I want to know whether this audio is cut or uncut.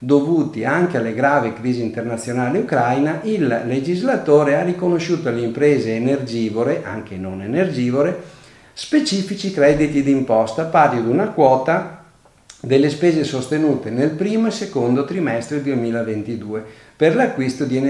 uncut